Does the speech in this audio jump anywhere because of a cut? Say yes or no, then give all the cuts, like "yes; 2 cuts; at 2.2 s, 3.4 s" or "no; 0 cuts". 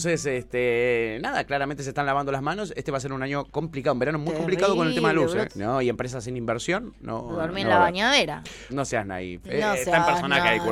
yes; 2 cuts; at 5.5 s, 8.7 s